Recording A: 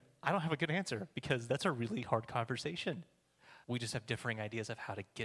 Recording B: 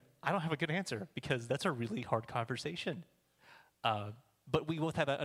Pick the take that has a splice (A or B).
A